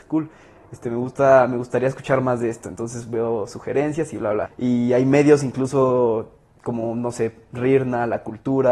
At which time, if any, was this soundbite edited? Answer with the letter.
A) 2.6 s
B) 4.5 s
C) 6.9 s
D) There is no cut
B